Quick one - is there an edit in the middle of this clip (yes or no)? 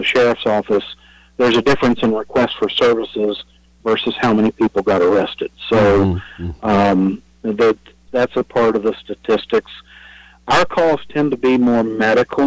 yes